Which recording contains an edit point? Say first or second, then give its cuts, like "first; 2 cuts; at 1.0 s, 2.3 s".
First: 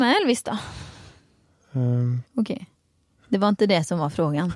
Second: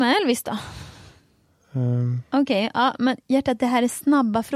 first; 1 cut; at 2.2 s